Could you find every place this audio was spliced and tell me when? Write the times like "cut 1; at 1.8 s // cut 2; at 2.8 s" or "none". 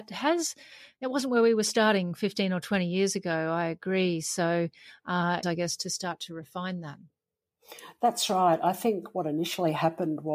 cut 1; at 5.4 s